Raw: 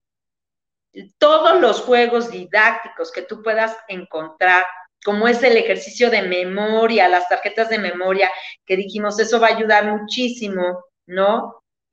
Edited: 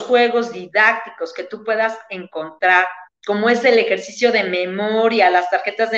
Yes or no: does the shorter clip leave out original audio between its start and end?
no